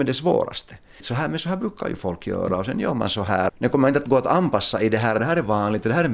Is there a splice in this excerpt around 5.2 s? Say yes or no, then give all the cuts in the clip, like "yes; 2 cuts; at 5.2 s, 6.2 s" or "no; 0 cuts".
yes; 3 cuts; at 1.0 s, 3.5 s, 5.2 s